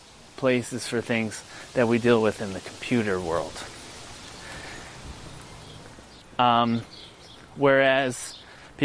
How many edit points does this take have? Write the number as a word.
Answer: one